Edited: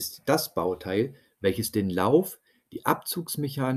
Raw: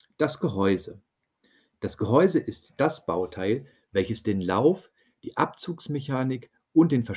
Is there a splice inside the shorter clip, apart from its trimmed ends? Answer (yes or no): no